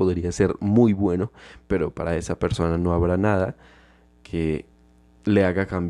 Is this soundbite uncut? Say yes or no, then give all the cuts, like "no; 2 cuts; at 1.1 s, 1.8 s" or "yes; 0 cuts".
yes; 0 cuts